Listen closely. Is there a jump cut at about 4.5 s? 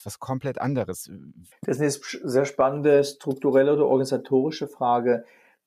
no; 1 cut; at 1.5 s

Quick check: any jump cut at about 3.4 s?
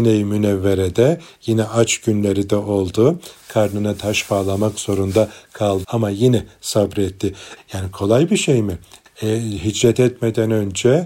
no; 3 cuts; at 5.8 s, 7.6 s, 9.1 s

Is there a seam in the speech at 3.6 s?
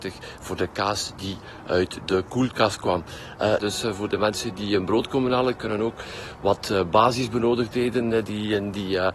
yes; 1 cut; at 3.6 s

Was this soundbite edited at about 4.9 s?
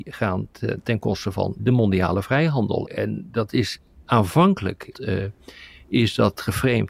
yes; 3 cuts; at 1.6 s, 2.8 s, 4.9 s

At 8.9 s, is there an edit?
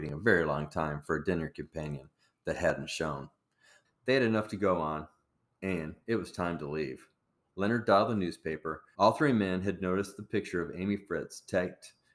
yes; 3 cuts; at 3.8 s, 7.5 s, 8.9 s

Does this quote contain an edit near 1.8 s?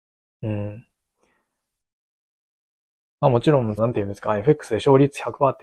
no; 1 cut; at 3.8 s

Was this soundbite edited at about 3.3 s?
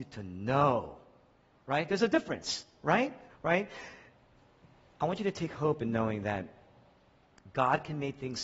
yes; 1 cut; at 3.3 s

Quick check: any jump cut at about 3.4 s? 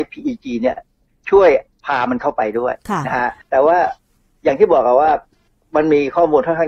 yes; 1 cut; at 3.4 s

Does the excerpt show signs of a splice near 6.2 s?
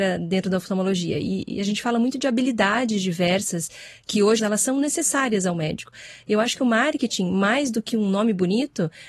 no; 1 cut; at 4.4 s

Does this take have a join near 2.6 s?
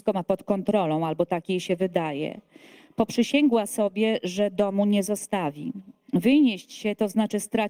no; 0 cuts

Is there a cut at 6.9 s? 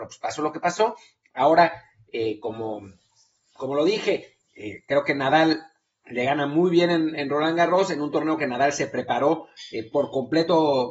no; 0 cuts

